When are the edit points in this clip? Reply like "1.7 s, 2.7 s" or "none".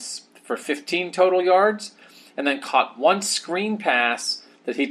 none